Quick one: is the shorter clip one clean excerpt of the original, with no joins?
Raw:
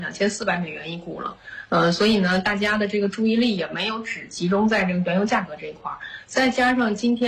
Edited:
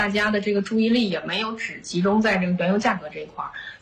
yes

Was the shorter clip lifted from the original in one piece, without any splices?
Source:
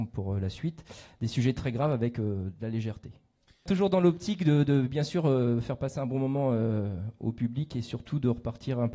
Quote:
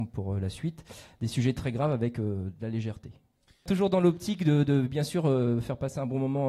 yes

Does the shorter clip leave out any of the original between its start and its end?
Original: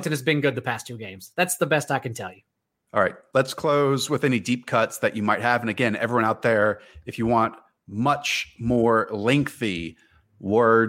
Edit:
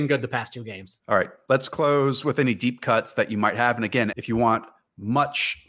yes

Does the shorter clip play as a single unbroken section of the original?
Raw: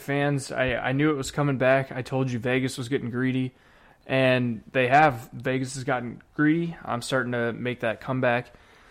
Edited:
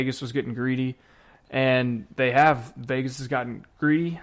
yes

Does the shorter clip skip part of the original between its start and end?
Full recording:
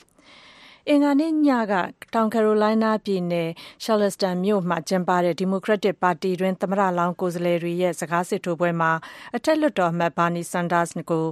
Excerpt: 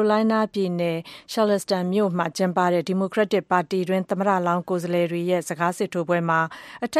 no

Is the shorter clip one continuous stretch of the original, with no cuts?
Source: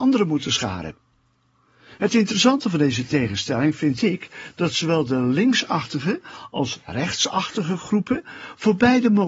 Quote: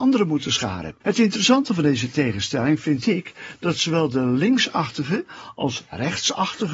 no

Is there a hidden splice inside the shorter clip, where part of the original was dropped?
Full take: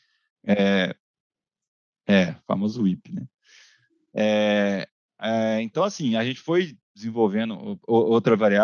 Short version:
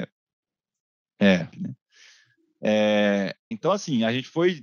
yes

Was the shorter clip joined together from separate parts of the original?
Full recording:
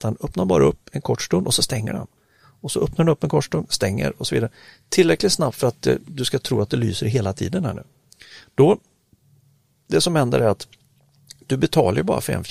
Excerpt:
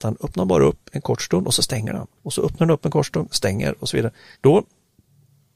yes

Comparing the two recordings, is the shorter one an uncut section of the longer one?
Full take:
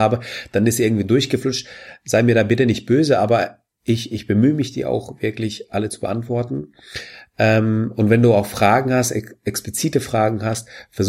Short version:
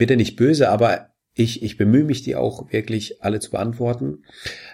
yes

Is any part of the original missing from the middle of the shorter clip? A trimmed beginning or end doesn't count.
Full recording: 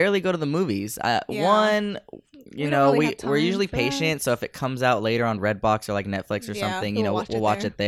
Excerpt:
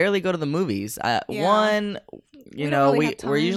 no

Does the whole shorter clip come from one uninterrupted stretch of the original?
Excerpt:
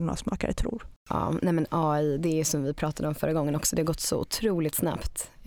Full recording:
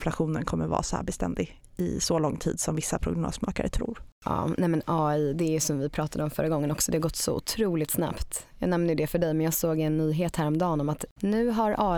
yes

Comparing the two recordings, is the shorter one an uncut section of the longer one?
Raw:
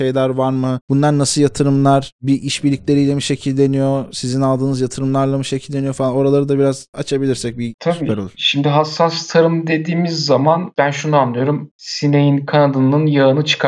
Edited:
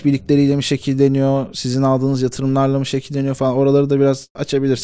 yes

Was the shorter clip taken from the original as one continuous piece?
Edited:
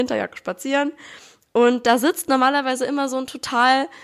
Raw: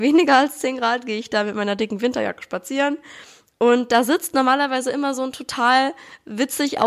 yes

